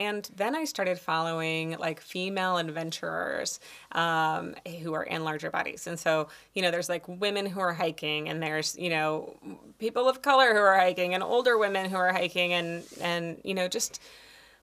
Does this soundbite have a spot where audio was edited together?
no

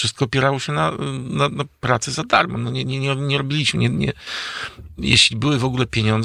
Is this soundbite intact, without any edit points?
yes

